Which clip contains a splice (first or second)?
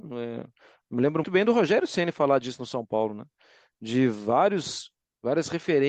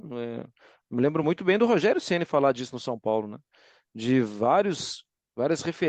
first